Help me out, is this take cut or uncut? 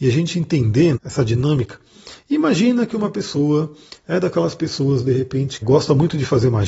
cut